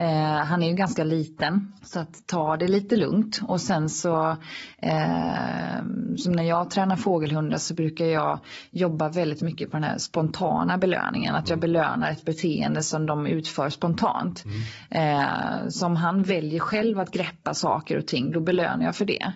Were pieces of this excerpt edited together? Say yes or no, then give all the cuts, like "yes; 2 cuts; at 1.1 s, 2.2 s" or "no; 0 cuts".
yes; 1 cut; at 1.8 s